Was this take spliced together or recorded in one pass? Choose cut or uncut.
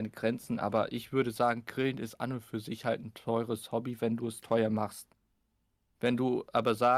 uncut